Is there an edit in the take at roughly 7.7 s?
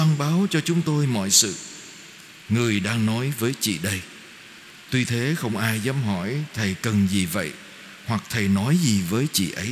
no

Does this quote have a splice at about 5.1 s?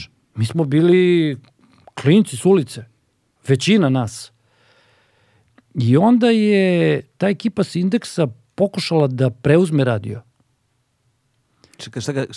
no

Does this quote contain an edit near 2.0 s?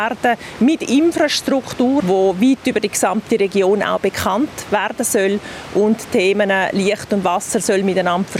yes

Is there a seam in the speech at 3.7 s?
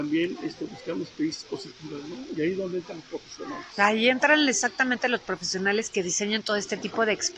no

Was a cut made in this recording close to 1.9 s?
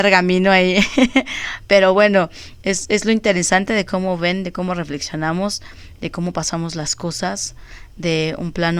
no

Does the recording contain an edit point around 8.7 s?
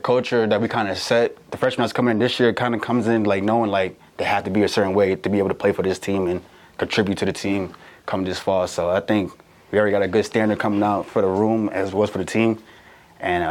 no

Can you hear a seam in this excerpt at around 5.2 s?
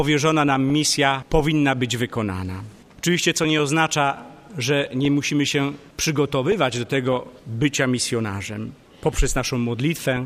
no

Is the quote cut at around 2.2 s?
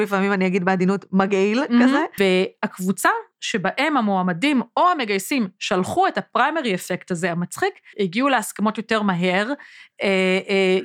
yes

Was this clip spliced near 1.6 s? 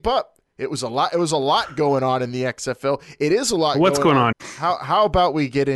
no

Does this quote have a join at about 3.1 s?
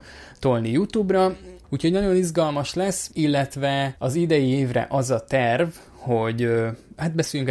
no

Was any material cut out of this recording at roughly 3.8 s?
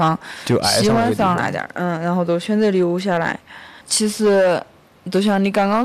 yes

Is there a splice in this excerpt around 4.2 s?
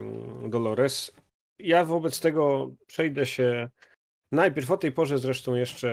no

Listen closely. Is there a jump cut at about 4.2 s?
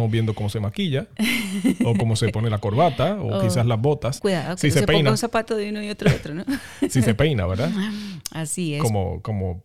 yes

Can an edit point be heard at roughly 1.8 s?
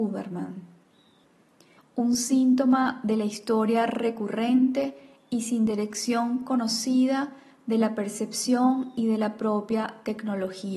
yes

